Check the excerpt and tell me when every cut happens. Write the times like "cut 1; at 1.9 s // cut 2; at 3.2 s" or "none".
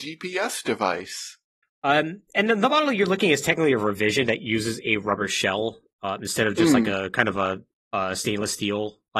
cut 1; at 1.6 s